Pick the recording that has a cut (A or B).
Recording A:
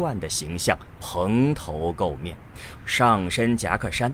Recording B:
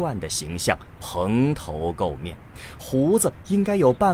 A